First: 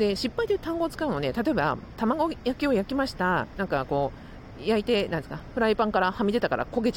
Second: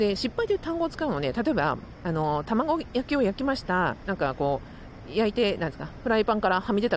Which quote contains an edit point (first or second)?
first